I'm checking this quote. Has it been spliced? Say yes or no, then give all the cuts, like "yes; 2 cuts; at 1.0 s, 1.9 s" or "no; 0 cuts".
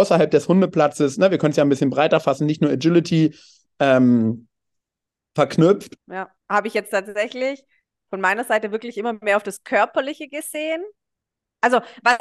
yes; 1 cut; at 6.0 s